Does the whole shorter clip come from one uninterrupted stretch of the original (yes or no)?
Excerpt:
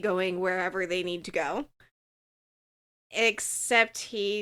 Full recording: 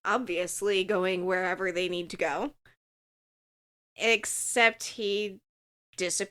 yes